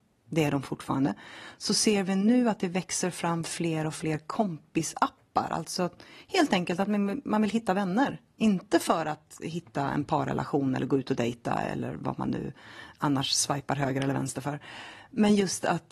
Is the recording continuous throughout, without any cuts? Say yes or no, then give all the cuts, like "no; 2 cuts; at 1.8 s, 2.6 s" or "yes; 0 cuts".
yes; 0 cuts